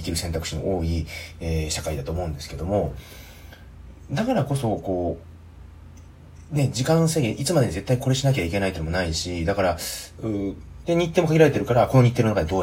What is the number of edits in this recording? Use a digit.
1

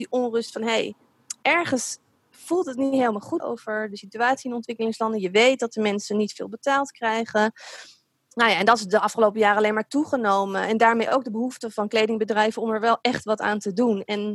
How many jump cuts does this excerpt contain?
1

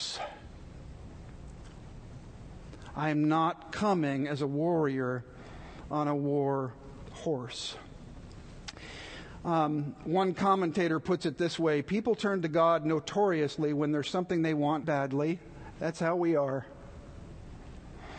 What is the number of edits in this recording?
1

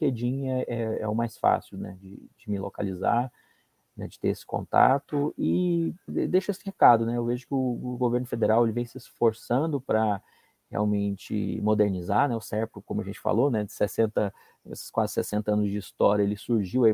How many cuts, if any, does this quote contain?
1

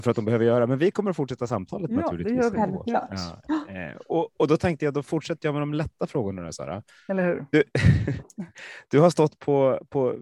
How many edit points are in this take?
0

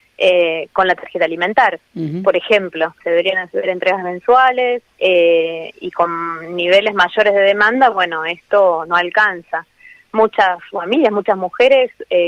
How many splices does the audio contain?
2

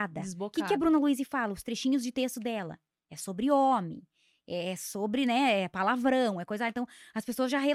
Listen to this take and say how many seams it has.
0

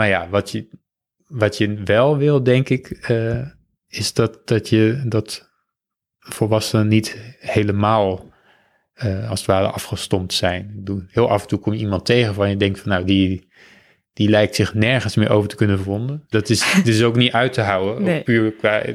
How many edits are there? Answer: 1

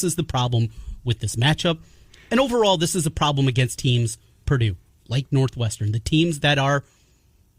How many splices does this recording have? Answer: 1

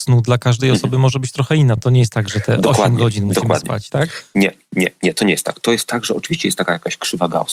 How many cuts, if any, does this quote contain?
0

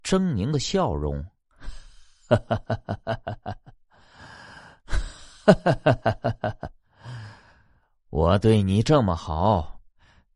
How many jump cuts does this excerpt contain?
0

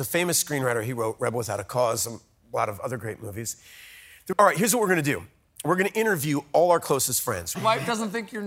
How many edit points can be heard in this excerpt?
2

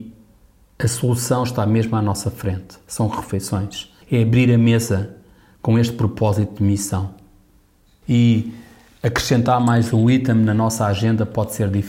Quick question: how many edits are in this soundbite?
2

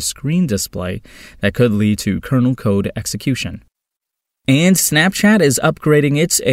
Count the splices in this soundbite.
0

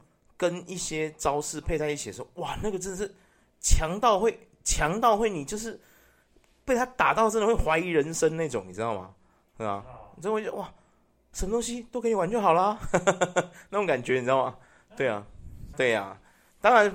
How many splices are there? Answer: 1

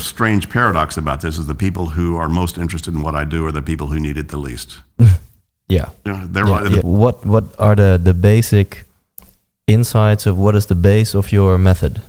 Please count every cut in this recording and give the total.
1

